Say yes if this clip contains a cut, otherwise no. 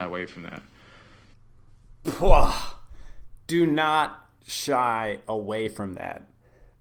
no